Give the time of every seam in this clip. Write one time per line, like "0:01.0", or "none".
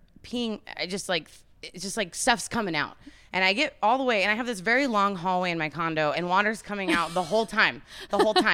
0:06.1